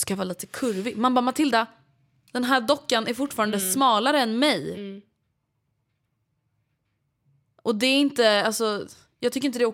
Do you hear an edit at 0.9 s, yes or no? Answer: no